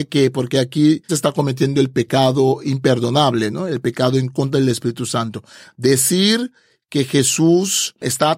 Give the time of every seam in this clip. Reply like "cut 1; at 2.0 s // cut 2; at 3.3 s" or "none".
cut 1; at 1.1 s